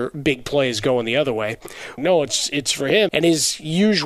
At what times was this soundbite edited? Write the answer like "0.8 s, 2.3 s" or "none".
2.0 s, 3.1 s